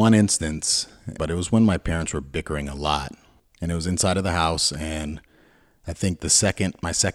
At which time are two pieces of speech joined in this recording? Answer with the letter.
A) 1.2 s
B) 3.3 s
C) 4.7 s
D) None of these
A